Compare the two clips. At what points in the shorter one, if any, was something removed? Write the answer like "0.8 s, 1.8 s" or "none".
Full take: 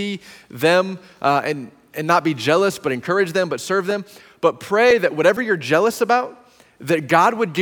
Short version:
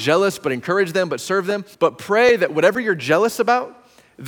1.7 s